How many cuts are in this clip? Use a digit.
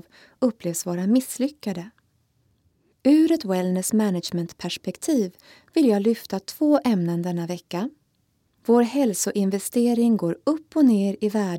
2